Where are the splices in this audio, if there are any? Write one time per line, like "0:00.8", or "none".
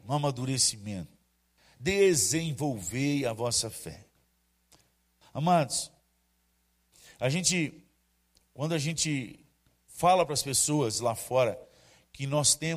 none